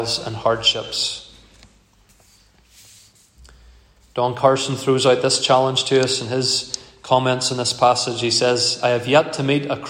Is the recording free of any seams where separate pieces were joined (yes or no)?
yes